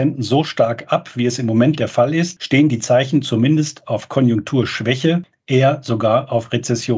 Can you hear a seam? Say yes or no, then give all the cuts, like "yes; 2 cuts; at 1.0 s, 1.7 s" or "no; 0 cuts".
no; 0 cuts